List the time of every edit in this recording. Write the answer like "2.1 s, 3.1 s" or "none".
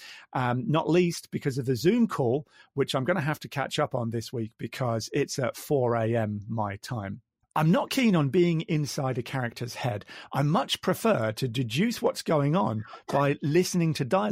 none